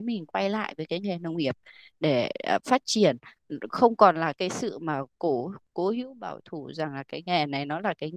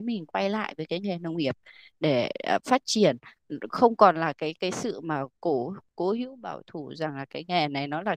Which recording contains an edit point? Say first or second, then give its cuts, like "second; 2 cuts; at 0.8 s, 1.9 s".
first; 1 cut; at 4.3 s